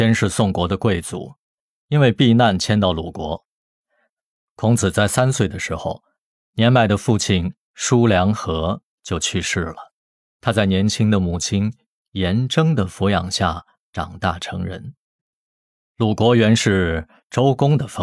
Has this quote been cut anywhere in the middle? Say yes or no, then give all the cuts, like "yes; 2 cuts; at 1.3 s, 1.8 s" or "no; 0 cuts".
no; 0 cuts